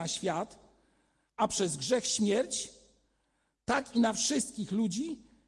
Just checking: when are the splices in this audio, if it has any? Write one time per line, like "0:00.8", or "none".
none